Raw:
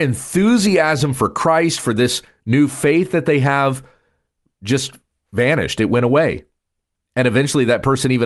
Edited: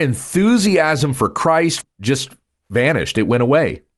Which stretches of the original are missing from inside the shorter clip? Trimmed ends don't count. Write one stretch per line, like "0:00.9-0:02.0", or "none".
0:01.8-0:04.4